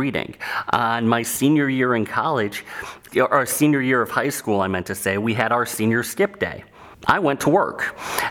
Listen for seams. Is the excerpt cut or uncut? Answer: cut